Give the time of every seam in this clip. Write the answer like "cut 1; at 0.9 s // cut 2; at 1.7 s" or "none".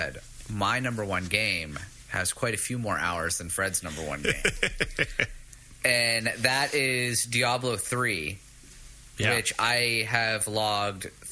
none